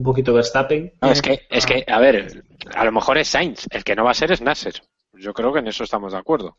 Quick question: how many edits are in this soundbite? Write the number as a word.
one